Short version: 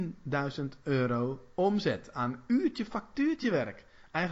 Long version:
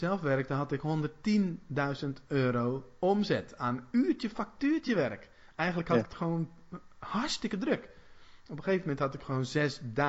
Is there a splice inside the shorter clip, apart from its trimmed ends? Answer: no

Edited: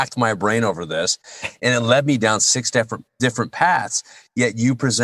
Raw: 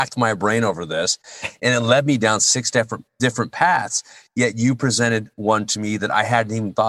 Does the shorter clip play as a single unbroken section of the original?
yes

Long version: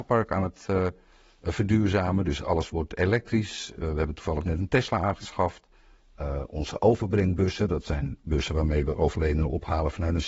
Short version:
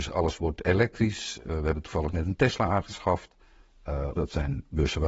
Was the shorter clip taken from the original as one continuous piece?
no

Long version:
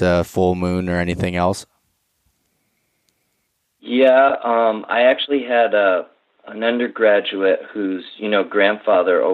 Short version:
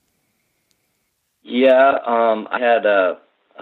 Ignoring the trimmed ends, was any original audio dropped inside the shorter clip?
yes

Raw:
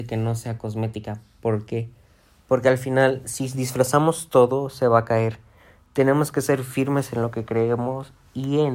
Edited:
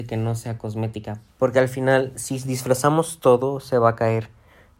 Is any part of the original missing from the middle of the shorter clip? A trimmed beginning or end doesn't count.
yes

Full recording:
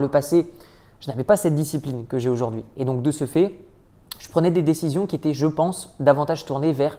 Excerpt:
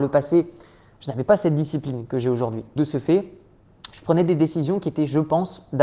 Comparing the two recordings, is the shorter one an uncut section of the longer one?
no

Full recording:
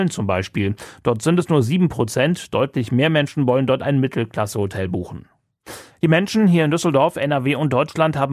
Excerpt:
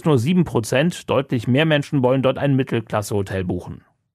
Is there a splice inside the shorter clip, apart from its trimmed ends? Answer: no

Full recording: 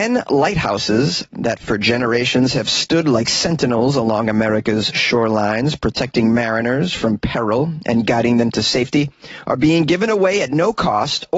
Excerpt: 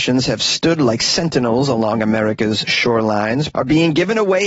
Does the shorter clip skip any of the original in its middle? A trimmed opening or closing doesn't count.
yes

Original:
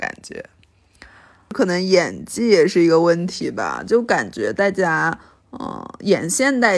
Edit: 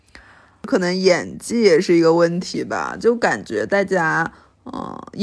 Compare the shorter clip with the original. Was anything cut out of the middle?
no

